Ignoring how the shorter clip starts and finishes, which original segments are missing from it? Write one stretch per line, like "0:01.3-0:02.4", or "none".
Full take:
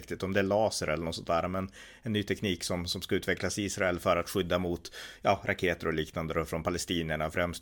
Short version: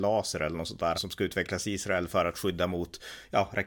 0:01.4-0:02.9